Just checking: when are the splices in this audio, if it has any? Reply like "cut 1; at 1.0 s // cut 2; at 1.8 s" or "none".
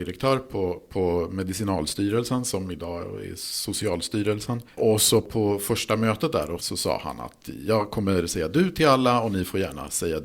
cut 1; at 6.6 s